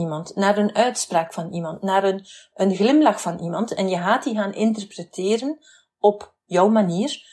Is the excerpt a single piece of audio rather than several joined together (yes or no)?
yes